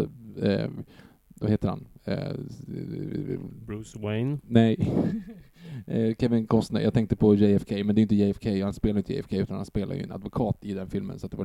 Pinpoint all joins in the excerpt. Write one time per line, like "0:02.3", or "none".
none